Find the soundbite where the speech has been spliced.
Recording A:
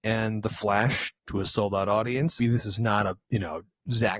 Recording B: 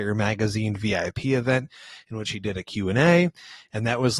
A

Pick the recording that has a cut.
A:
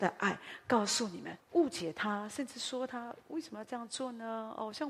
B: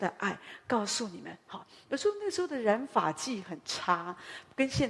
A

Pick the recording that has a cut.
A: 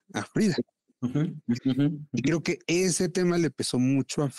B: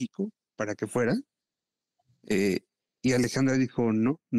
A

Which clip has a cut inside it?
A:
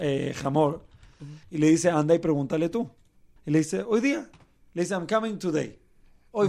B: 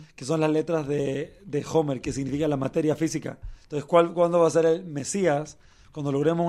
A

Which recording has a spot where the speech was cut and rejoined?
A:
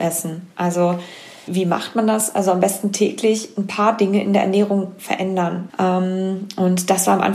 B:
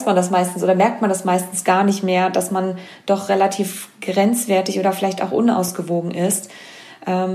A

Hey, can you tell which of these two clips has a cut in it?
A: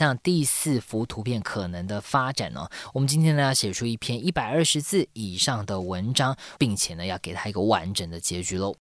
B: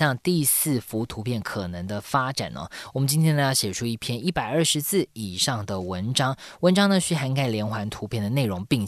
A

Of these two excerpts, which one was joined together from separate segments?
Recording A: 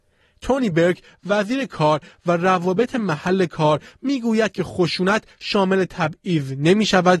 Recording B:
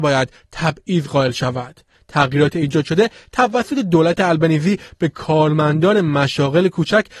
B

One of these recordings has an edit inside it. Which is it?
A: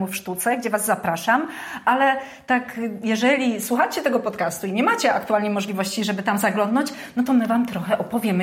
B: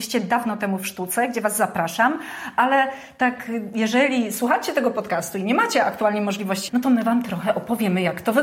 B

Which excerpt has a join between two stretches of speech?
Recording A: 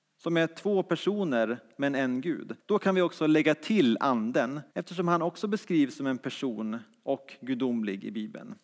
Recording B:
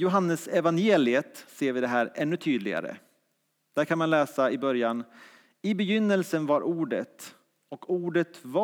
A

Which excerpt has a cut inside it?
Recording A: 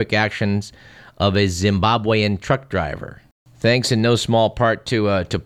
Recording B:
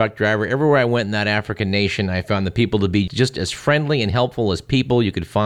B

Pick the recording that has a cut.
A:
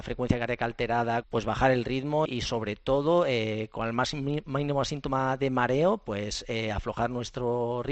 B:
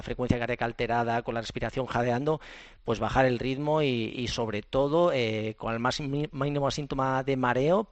A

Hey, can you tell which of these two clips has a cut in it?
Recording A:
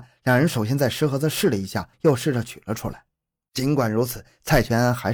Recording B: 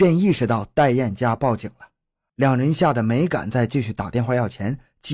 A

